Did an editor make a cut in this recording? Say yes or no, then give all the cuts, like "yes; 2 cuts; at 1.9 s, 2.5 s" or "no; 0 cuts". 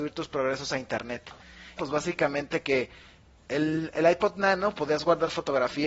yes; 1 cut; at 1.8 s